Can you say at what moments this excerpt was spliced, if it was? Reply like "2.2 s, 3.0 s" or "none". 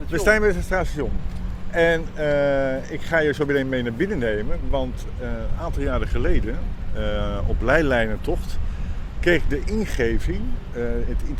none